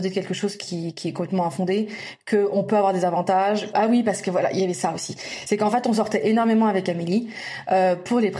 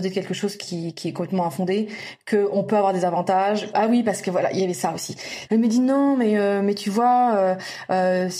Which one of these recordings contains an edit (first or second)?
second